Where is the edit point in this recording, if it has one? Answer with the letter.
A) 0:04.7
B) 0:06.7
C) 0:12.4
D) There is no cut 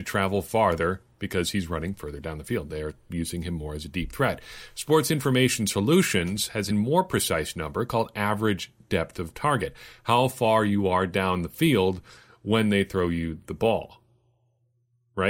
B